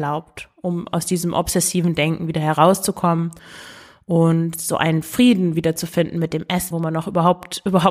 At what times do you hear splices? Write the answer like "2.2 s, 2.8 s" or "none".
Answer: 6.7 s